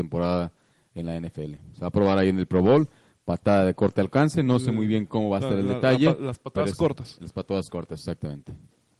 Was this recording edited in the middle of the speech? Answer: no; 0 cuts

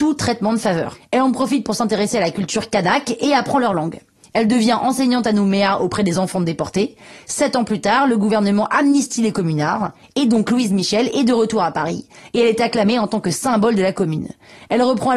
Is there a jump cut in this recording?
no; 0 cuts

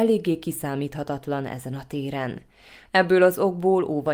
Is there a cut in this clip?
yes; 1 cut; at 2.9 s

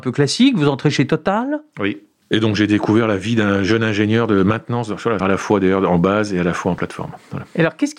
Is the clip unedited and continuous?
no; 2 cuts; at 2.2 s, 5.2 s

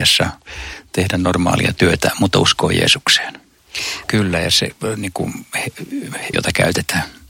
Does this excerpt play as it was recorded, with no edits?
no; 2 cuts; at 4.1 s, 6.3 s

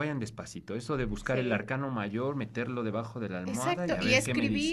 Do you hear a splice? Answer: no; 0 cuts

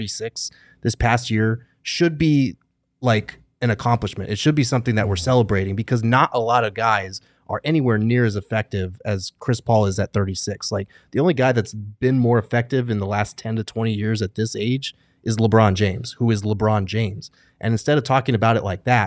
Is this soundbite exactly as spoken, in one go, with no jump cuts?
yes; 0 cuts

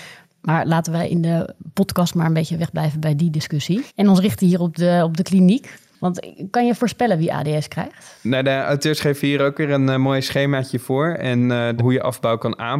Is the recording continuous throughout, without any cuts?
no; 2 cuts; at 3.9 s, 11.8 s

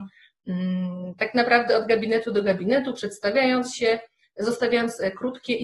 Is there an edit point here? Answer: no; 0 cuts

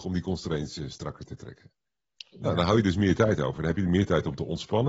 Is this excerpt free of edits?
yes; 0 cuts

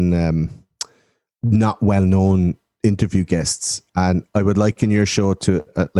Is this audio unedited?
yes; 0 cuts

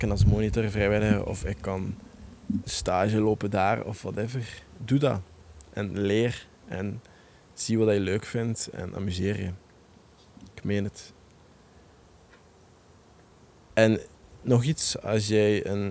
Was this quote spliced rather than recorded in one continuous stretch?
yes; 1 cut; at 2.6 s

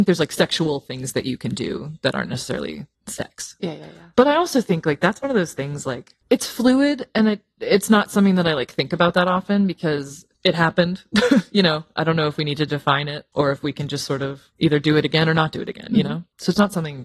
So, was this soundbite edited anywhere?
no; 0 cuts

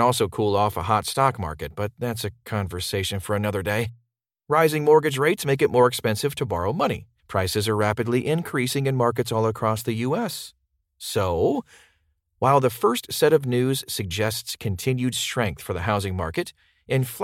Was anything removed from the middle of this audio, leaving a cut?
yes; 1 cut; at 7.2 s

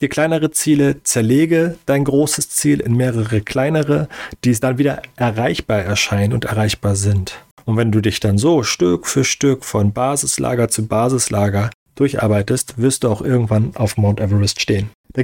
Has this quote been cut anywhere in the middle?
no; 0 cuts

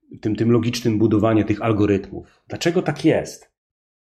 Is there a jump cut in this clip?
no; 0 cuts

